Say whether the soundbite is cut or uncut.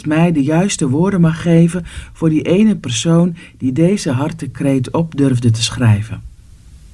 uncut